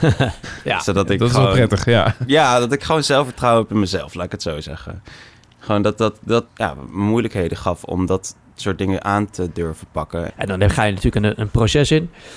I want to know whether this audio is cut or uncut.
cut